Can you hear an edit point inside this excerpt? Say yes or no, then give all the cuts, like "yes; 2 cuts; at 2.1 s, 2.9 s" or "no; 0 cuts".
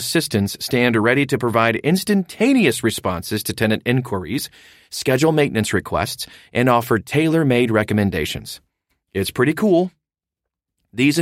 no; 0 cuts